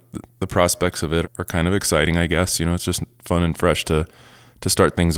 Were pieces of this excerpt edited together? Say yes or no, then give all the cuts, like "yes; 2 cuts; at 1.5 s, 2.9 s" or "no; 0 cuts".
yes; 1 cut; at 1.2 s